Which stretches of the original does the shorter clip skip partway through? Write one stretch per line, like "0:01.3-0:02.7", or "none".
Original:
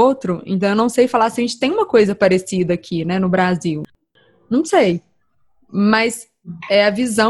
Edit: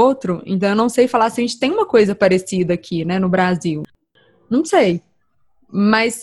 none